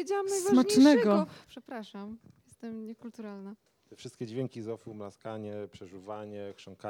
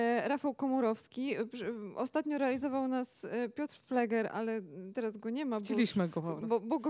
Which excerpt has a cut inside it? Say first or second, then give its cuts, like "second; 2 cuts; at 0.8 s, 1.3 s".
first; 1 cut; at 1.5 s